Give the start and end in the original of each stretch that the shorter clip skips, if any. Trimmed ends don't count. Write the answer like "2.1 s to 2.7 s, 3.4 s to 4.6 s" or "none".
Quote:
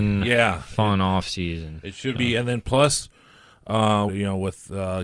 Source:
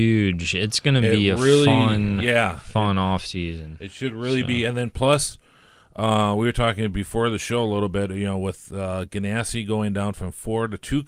4.1 s to 4.4 s, 6.4 s to 8.1 s